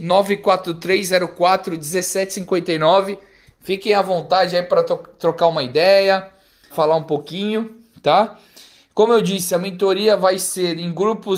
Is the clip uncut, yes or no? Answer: no